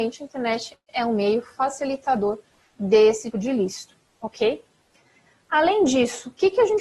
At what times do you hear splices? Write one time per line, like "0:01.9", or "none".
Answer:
0:03.3